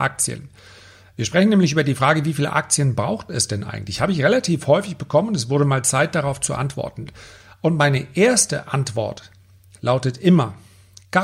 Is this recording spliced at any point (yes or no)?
no